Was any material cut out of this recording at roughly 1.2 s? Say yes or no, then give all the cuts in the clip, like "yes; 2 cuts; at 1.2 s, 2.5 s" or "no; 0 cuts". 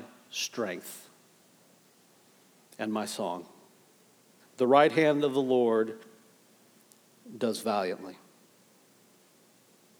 no; 1 cut; at 4.4 s